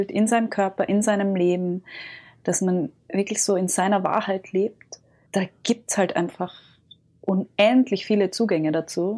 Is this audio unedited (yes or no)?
no